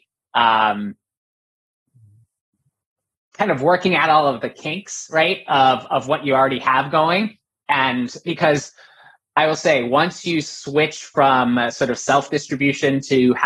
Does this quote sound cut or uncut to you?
uncut